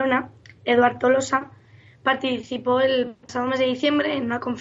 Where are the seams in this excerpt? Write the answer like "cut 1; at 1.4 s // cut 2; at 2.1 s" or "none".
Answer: none